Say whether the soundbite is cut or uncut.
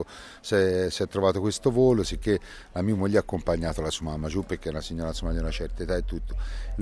uncut